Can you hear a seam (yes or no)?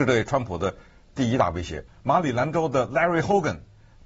yes